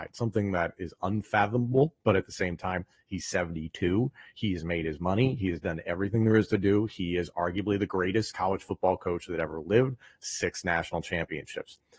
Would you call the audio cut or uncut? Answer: uncut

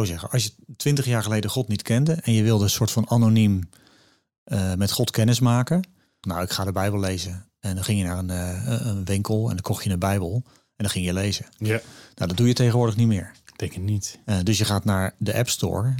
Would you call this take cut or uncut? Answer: cut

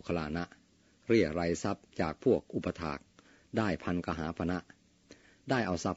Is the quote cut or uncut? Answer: uncut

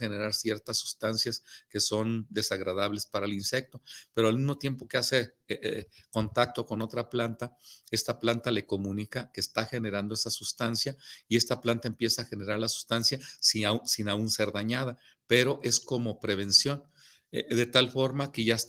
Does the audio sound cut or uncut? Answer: uncut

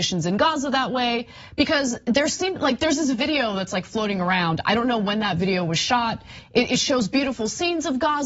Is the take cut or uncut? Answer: uncut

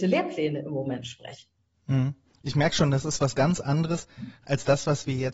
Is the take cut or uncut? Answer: uncut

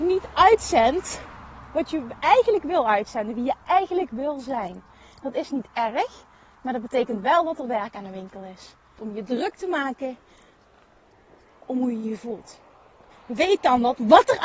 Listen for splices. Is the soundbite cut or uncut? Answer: cut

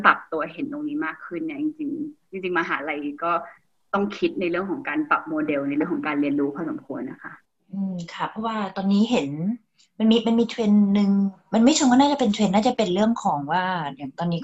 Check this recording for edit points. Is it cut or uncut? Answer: uncut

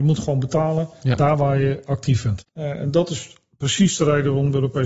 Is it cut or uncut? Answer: cut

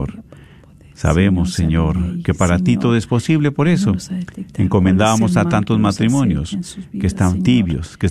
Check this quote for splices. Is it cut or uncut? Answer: uncut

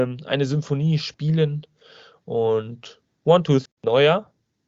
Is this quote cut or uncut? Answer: cut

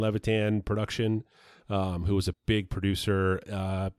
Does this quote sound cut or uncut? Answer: cut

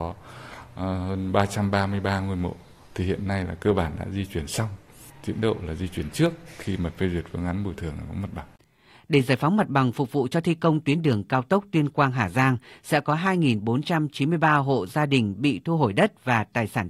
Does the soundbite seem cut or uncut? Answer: uncut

